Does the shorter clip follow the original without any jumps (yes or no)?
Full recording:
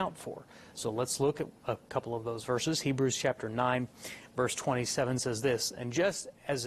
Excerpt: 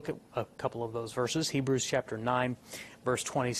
yes